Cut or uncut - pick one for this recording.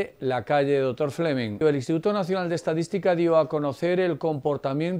cut